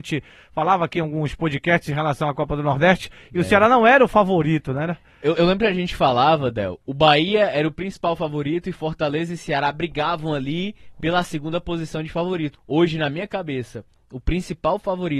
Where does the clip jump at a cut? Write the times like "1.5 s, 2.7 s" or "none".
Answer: 5.4 s, 12.5 s